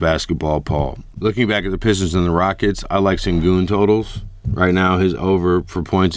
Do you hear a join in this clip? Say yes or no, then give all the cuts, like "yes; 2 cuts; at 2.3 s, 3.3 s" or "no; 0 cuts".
yes; 1 cut; at 1.1 s